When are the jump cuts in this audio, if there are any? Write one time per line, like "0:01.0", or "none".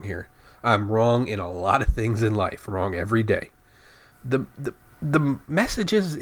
0:04.1